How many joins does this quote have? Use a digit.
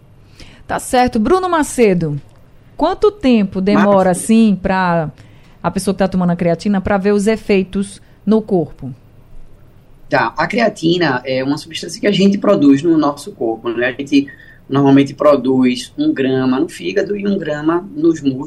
0